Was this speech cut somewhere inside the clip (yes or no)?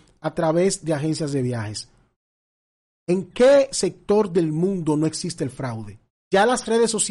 yes